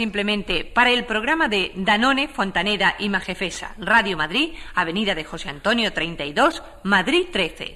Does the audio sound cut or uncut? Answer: uncut